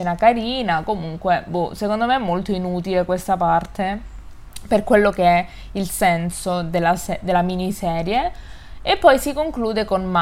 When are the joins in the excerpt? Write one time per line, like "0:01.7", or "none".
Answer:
none